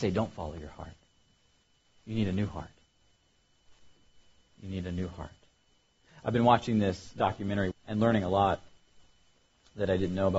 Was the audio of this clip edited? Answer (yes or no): yes